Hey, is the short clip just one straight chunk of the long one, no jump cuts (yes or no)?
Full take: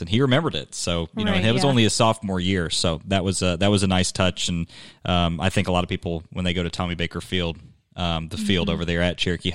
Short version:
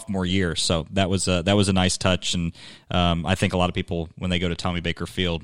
yes